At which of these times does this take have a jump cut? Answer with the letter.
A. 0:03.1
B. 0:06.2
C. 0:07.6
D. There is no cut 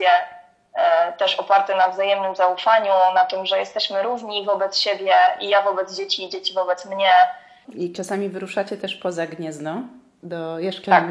C